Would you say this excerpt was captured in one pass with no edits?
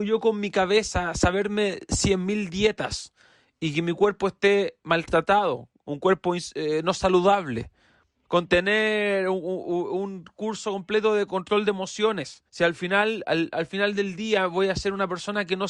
no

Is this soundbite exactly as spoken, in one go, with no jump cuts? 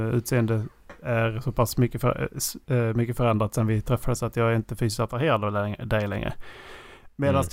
no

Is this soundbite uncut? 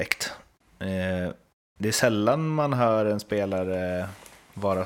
yes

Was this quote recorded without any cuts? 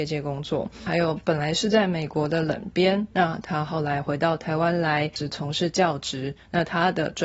yes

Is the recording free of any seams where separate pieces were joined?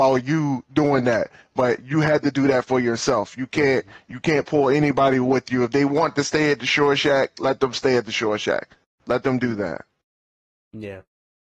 yes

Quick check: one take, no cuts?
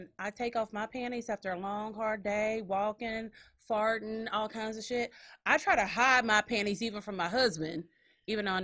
yes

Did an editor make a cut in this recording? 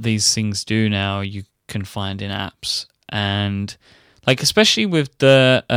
no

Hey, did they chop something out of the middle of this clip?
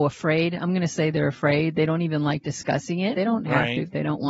yes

